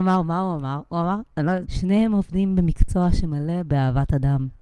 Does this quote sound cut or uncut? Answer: cut